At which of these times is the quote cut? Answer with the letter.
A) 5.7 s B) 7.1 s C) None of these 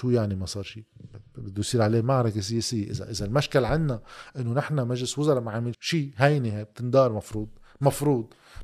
A